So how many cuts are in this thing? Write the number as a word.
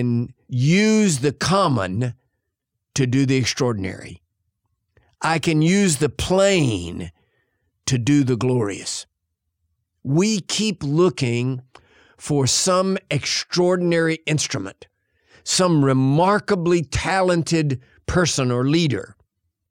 zero